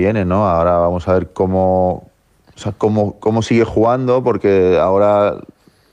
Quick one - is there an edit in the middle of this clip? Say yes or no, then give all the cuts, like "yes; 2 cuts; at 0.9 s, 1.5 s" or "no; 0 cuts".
no; 0 cuts